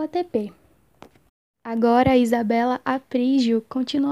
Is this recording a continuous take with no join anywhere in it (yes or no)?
yes